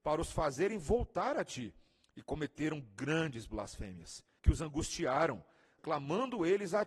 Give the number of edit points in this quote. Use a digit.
2